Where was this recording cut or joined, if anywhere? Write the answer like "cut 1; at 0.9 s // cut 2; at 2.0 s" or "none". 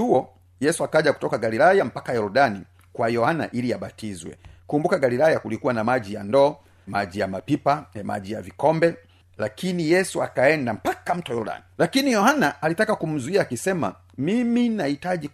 cut 1; at 6.9 s // cut 2; at 11.7 s

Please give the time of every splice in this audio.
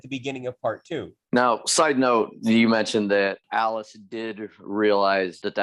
cut 1; at 1.2 s

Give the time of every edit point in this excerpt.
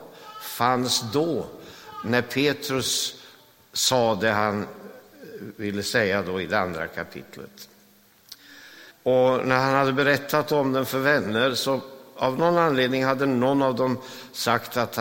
cut 1; at 8.9 s

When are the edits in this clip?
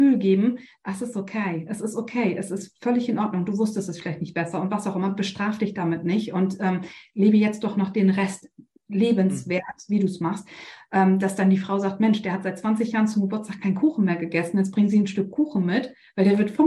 none

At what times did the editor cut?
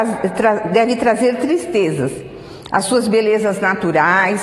cut 1; at 2.7 s

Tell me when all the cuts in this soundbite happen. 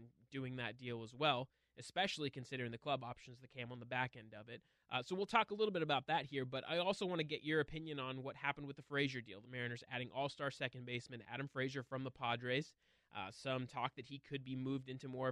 none

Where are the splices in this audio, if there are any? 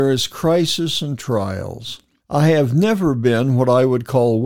cut 1; at 2.2 s

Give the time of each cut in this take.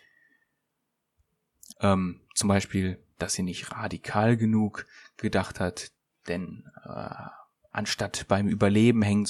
cut 1; at 1.7 s

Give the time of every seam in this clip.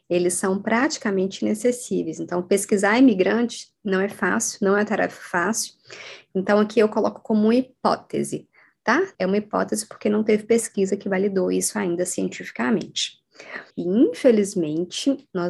cut 1; at 9.1 s // cut 2; at 13.7 s

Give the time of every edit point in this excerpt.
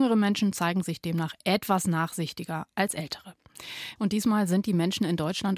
cut 1; at 4.0 s

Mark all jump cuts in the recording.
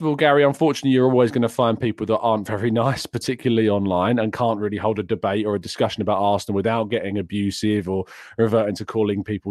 none

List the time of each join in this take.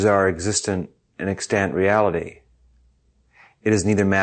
none

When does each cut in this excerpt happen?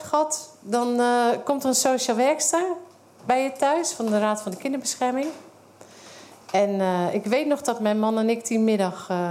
none

